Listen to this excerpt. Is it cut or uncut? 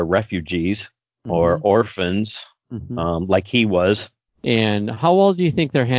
cut